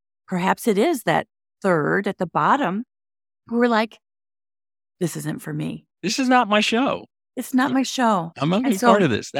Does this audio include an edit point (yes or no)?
no